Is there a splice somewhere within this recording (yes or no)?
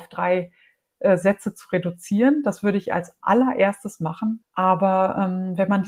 yes